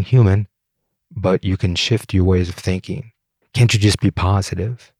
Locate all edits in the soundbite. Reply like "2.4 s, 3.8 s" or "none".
3.4 s